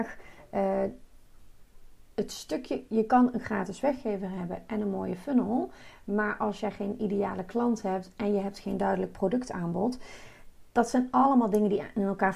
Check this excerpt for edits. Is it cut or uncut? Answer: uncut